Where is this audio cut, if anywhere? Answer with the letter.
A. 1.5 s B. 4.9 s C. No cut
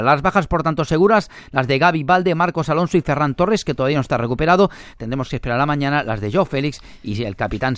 B